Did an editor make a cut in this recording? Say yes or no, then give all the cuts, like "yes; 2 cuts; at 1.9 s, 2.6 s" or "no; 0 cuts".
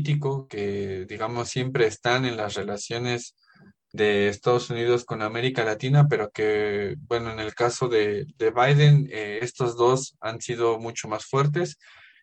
no; 0 cuts